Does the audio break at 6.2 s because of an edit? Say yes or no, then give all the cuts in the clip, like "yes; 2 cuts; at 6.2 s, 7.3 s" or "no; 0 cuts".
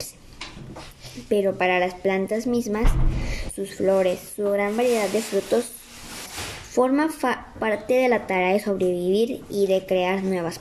yes; 2 cuts; at 3.6 s, 6.2 s